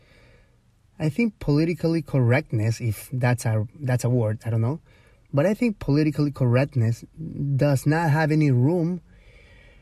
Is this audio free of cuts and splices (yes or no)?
yes